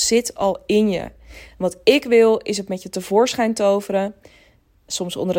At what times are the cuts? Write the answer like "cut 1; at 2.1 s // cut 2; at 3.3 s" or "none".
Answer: none